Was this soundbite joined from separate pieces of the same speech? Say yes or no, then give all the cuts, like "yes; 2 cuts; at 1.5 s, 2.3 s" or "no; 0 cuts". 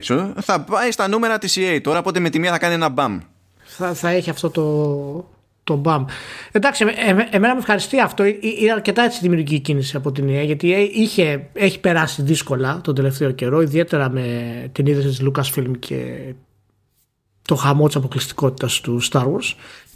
no; 0 cuts